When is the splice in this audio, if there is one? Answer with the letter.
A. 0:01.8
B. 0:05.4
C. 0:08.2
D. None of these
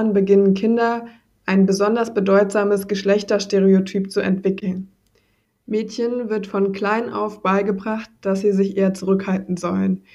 B